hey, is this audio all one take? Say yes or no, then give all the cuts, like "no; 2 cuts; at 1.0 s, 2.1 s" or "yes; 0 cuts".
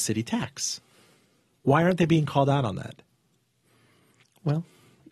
yes; 0 cuts